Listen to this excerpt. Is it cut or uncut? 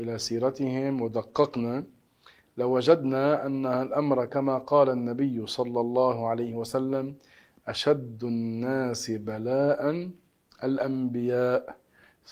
uncut